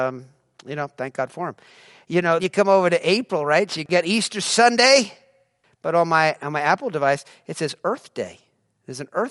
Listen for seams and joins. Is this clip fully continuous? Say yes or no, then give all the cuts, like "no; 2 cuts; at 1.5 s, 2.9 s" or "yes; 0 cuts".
no; 1 cut; at 2.4 s